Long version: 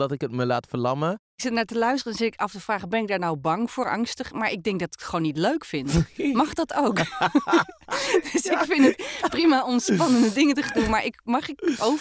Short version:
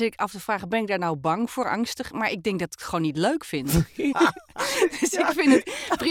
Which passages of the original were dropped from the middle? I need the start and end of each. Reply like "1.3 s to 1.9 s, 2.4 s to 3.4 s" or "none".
6.3 s to 7.4 s